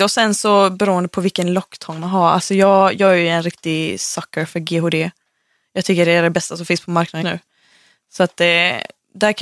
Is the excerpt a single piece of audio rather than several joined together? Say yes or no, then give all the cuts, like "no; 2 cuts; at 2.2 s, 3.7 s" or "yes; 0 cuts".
no; 1 cut; at 7.2 s